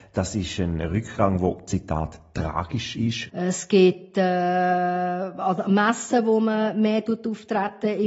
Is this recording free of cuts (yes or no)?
no